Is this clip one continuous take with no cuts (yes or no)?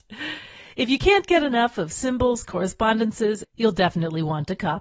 no